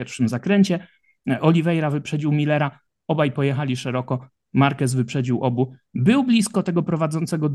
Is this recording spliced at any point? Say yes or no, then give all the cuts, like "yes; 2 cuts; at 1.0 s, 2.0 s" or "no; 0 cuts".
no; 0 cuts